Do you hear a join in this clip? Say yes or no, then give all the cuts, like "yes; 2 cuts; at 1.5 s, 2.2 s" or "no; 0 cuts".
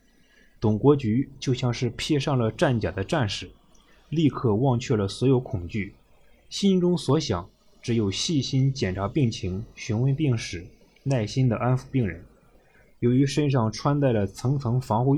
no; 0 cuts